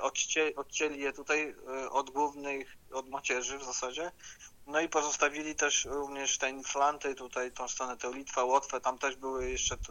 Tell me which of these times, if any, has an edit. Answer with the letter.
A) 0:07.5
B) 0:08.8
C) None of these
A